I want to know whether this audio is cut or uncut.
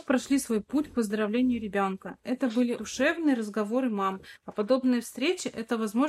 cut